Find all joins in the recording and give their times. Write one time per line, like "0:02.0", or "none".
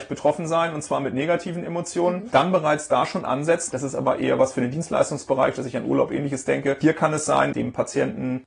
0:03.7
0:07.5